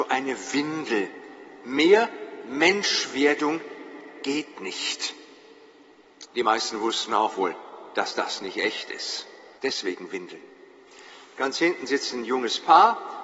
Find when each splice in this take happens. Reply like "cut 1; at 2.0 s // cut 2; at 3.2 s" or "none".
cut 1; at 6.3 s // cut 2; at 9.6 s